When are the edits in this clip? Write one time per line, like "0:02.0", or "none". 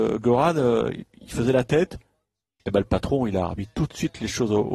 none